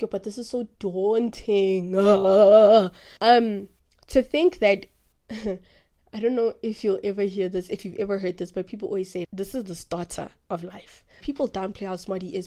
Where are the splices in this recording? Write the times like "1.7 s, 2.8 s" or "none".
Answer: 3.2 s, 9.2 s, 11.2 s